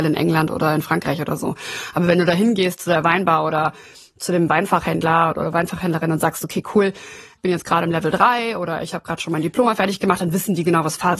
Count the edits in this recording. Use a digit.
1